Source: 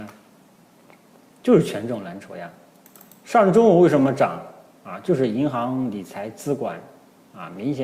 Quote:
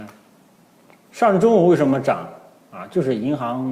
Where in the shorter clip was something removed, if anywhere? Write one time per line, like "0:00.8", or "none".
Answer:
0:01.1